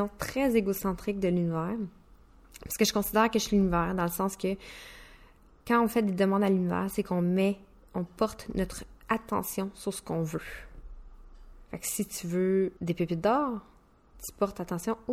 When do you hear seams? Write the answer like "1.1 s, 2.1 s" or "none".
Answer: 11.7 s, 12.8 s

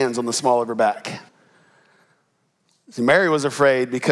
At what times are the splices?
1.3 s

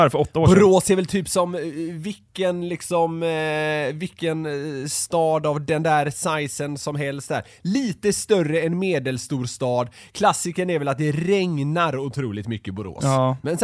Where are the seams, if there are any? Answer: none

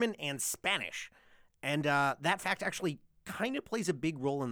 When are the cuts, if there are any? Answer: none

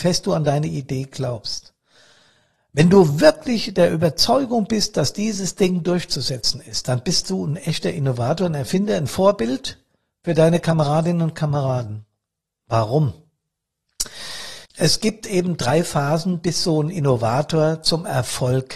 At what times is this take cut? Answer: 14.7 s

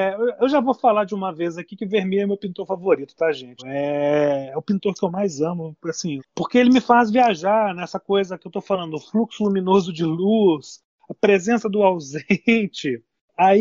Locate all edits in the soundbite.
3.6 s, 6.2 s

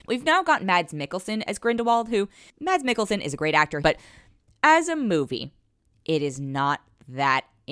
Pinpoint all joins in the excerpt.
3.8 s

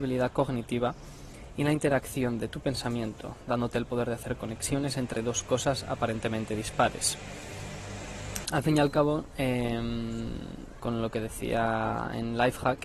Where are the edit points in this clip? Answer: 8.4 s, 10.8 s

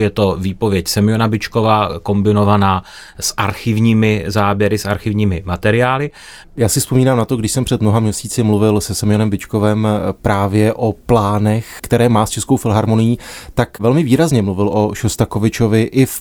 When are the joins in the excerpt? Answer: 6.4 s

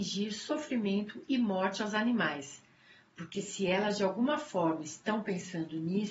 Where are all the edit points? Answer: none

